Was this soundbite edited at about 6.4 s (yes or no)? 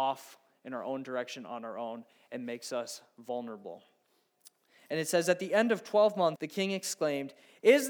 yes